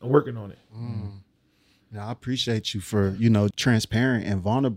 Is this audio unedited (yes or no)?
no